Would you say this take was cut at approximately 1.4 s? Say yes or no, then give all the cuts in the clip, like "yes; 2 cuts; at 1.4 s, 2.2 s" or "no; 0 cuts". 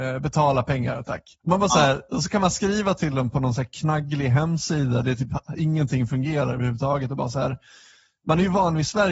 yes; 1 cut; at 1.4 s